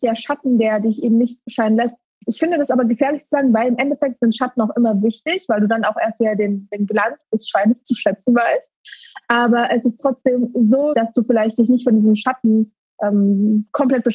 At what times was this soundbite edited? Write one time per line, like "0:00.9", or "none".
0:10.9